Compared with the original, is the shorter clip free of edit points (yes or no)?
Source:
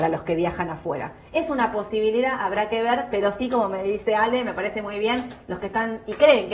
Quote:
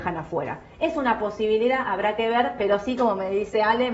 yes